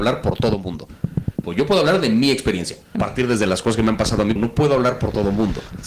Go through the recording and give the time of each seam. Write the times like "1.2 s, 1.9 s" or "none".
1.4 s, 2.9 s, 4.4 s